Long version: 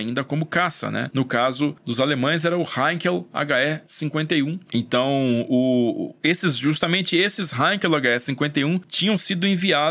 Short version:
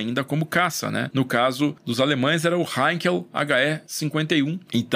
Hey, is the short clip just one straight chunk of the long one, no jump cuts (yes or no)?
yes